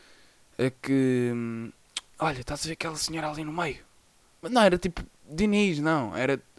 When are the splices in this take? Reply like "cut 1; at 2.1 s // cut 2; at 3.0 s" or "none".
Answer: cut 1; at 2.1 s // cut 2; at 4.4 s